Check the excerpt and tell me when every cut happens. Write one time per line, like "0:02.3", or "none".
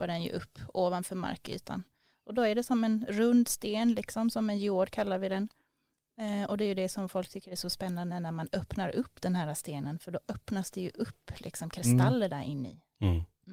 none